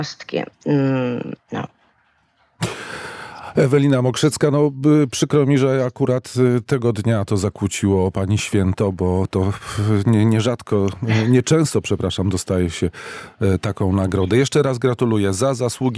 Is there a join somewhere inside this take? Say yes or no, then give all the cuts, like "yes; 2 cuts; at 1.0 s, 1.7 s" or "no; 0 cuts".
no; 0 cuts